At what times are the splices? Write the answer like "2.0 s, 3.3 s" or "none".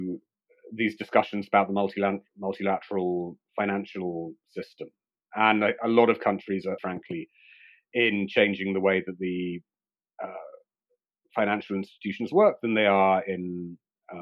6.8 s